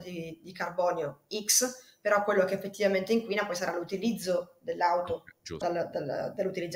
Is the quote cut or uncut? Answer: cut